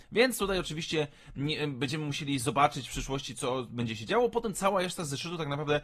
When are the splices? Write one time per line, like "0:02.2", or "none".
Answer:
none